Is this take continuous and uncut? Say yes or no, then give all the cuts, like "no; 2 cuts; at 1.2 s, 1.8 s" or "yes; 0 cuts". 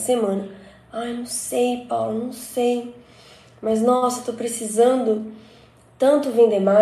yes; 0 cuts